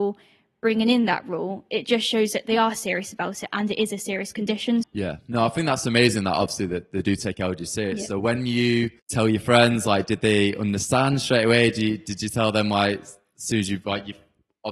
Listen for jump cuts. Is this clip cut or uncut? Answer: cut